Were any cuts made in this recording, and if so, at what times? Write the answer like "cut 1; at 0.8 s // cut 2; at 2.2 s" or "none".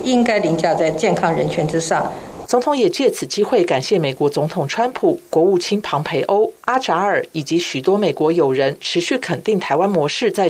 cut 1; at 2.5 s